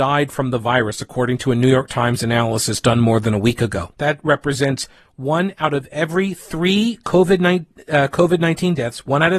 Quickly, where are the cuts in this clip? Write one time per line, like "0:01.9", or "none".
0:03.9